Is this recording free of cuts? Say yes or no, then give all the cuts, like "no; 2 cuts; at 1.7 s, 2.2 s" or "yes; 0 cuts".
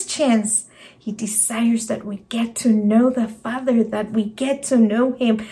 yes; 0 cuts